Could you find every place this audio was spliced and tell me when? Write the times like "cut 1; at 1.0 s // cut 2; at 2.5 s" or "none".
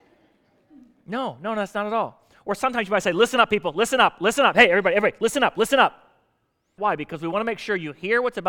cut 1; at 6.8 s

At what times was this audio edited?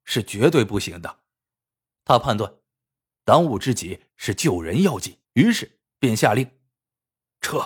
cut 1; at 3.1 s // cut 2; at 5.2 s

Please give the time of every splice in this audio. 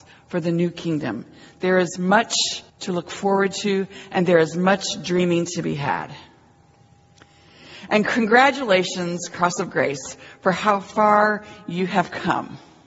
cut 1; at 2.7 s

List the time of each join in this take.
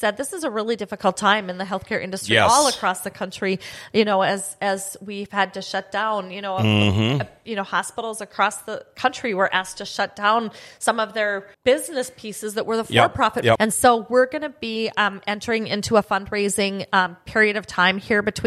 cut 1; at 11.5 s // cut 2; at 13.6 s

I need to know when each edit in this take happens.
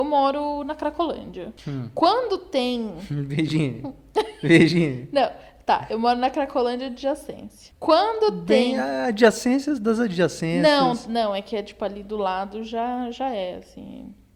none

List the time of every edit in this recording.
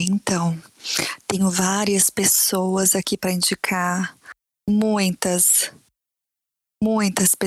none

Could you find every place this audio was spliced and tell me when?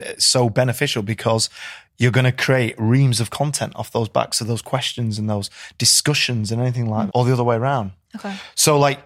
cut 1; at 7.1 s

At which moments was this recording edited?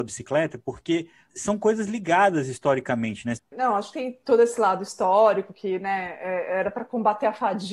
cut 1; at 3.4 s

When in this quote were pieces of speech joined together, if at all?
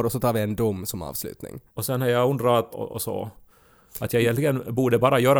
cut 1; at 1.7 s // cut 2; at 2.7 s

